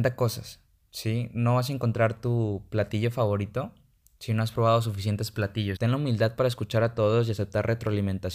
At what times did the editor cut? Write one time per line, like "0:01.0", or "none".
0:05.8